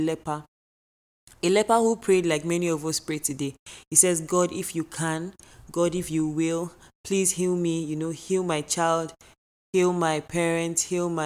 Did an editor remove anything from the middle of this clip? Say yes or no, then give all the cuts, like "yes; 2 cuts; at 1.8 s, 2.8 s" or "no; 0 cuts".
no; 0 cuts